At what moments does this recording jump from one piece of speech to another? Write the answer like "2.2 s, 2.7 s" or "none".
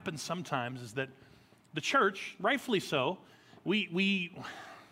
none

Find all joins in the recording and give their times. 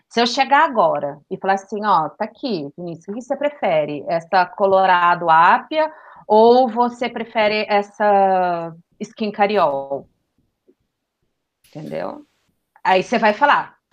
none

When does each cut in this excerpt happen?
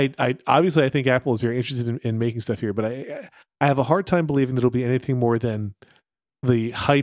none

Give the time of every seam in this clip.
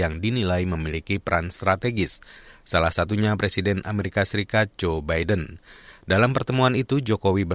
none

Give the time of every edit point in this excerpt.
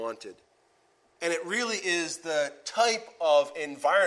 1.2 s

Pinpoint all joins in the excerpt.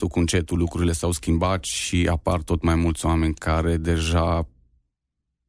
none

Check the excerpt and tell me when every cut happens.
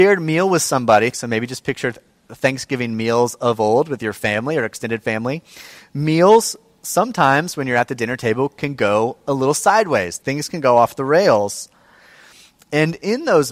1.1 s, 10.2 s

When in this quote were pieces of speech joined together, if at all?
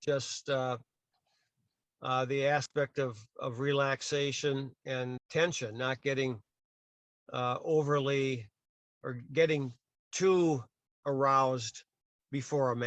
5.2 s

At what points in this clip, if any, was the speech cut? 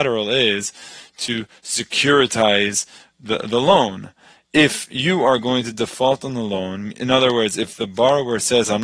none

